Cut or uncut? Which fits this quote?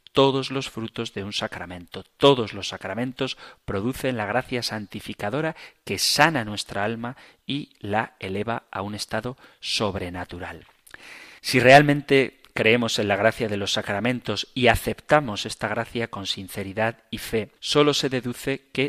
cut